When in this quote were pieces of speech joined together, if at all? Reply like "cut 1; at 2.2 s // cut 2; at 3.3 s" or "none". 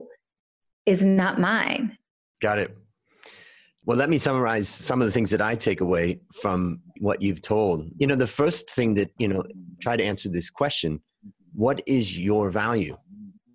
cut 1; at 2.3 s // cut 2; at 7.9 s // cut 3; at 9.2 s